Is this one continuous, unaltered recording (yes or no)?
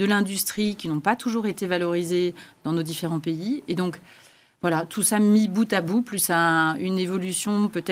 yes